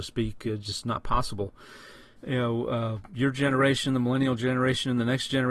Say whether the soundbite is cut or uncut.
cut